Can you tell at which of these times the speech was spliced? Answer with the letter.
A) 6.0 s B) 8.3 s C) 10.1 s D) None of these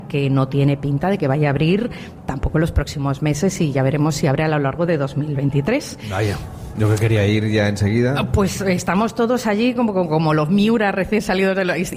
D